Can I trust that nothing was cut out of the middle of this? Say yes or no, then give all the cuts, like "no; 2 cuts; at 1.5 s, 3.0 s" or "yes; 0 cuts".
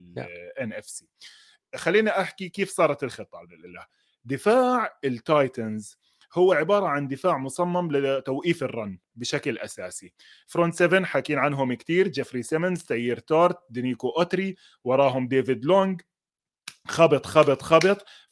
yes; 0 cuts